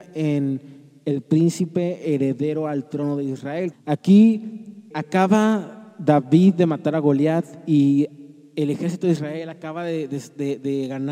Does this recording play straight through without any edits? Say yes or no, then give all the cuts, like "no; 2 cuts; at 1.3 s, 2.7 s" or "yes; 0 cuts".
no; 2 cuts; at 3.7 s, 4.9 s